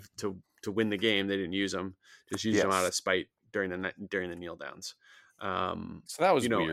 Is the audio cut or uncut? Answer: uncut